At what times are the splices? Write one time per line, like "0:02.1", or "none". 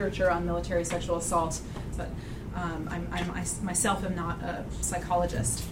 0:01.9